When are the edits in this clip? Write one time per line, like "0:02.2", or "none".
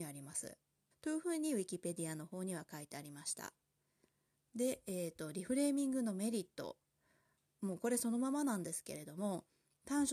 0:00.9
0:04.5